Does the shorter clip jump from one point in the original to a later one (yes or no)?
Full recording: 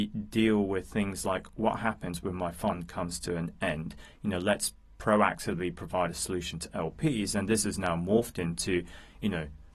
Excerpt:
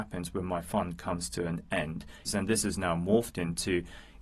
yes